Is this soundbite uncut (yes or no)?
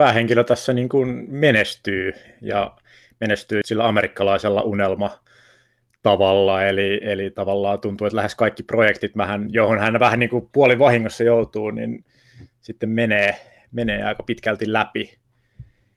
no